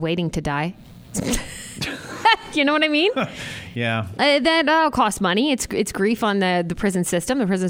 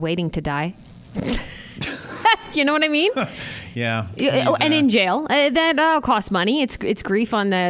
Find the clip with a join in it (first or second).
first